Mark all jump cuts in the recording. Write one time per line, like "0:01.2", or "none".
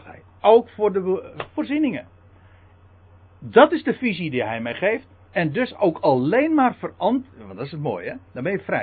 0:05.1